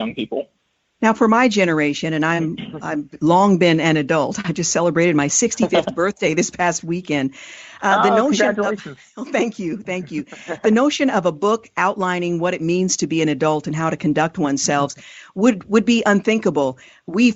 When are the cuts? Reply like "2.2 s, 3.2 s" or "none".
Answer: none